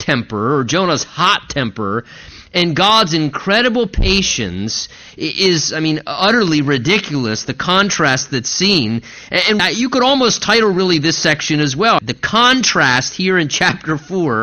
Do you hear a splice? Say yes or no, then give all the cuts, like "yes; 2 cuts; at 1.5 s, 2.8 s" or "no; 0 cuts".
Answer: yes; 2 cuts; at 9.6 s, 12.0 s